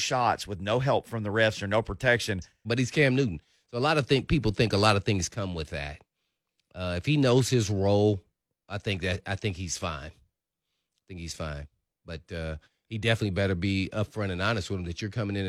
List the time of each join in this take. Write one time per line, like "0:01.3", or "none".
0:02.6